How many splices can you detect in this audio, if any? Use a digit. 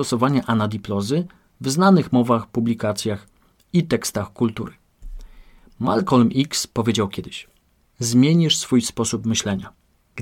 1